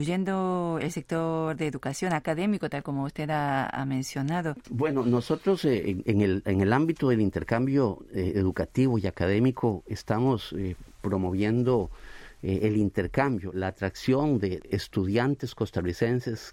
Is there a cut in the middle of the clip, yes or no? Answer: yes